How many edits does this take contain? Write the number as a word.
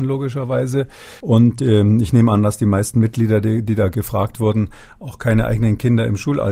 one